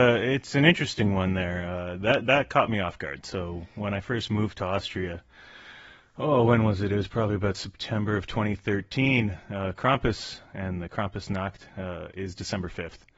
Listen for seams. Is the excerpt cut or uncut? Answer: uncut